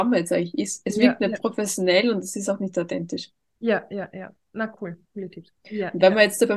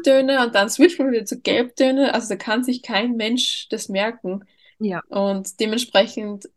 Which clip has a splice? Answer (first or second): first